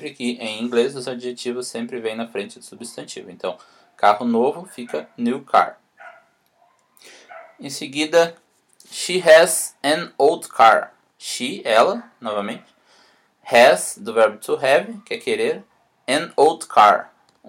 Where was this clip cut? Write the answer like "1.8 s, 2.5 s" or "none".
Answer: none